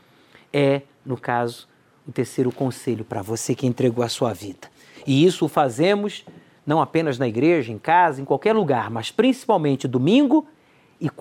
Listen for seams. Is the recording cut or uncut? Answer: uncut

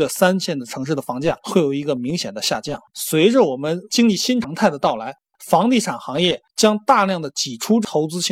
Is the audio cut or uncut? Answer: cut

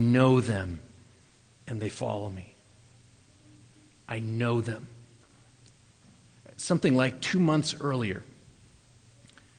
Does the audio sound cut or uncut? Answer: uncut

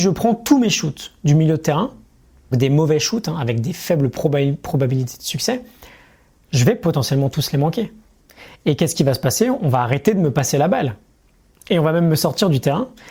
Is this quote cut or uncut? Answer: cut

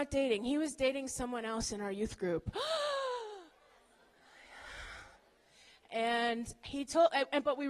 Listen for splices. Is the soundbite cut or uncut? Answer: uncut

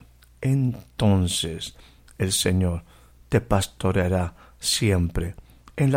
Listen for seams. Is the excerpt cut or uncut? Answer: uncut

